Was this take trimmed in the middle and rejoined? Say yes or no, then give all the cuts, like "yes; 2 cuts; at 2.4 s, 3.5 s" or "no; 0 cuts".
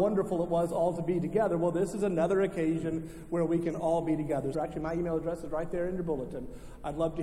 yes; 1 cut; at 4.5 s